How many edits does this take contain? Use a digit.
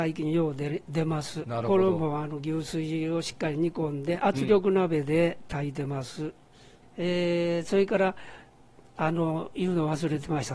0